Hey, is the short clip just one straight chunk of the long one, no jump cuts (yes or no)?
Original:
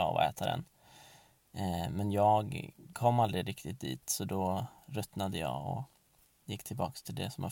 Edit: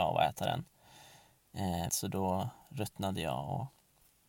no